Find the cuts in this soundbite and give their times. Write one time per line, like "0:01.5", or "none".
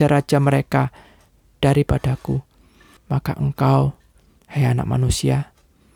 0:03.0